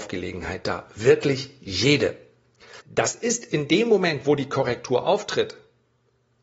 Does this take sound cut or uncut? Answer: cut